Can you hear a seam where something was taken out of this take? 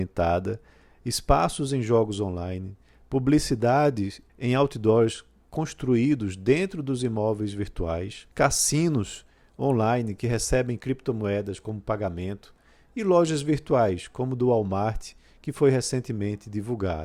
yes; 2 cuts; at 4.3 s, 8.3 s

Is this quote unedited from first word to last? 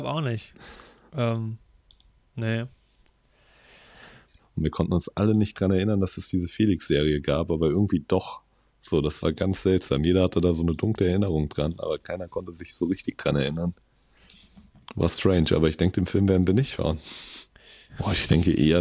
no; 2 cuts; at 4.4 s, 17.9 s

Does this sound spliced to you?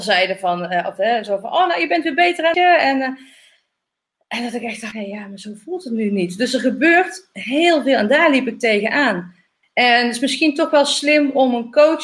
yes; 3 cuts; at 2.5 s, 4.9 s, 9.6 s

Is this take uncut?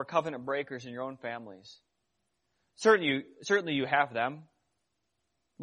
yes; 0 cuts

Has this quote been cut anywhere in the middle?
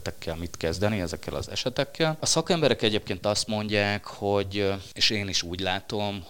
no; 0 cuts

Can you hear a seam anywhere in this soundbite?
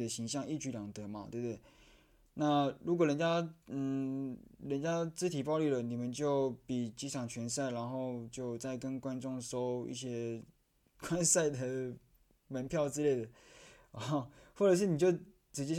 no; 0 cuts

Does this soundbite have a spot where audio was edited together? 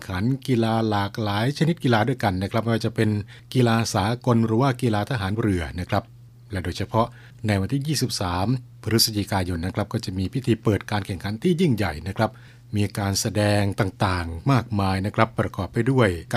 no; 0 cuts

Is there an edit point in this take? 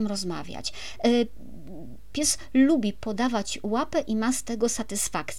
yes; 1 cut; at 2.1 s

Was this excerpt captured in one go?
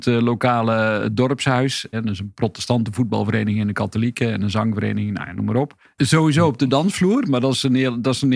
no; 2 cuts; at 1.9 s, 6.0 s

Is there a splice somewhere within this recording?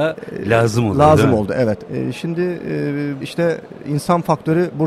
yes; 2 cuts; at 1.9 s, 3.2 s

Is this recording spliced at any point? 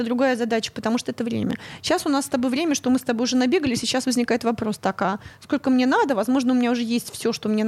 no; 0 cuts

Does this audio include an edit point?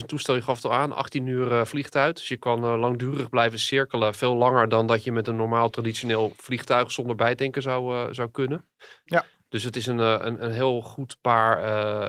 yes; 1 cut; at 9.1 s

